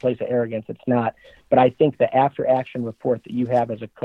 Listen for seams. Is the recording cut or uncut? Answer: uncut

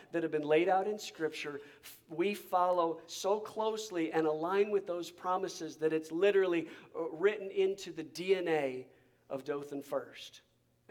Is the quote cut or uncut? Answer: uncut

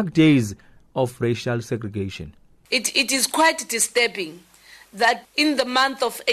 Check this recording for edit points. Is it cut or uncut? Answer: cut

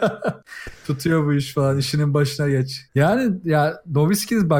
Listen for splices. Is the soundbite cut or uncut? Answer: cut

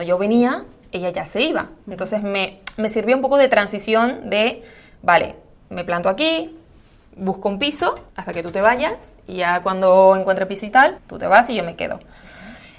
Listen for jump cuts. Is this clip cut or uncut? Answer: cut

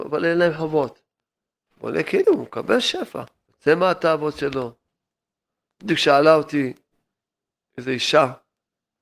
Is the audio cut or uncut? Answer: cut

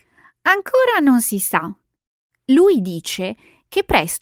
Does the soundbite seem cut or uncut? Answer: uncut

